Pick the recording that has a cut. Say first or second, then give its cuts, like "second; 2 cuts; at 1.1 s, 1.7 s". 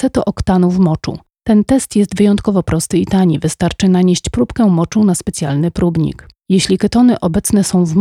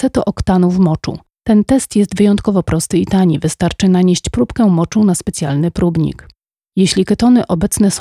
first; 1 cut; at 6.4 s